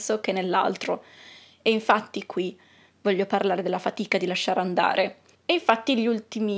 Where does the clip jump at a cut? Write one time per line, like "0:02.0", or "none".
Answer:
0:05.3